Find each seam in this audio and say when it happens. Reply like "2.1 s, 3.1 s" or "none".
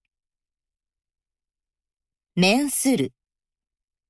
none